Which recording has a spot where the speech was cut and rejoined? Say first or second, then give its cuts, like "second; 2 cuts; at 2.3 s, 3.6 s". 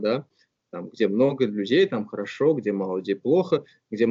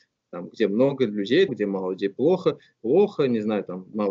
second; 2 cuts; at 1.5 s, 2.7 s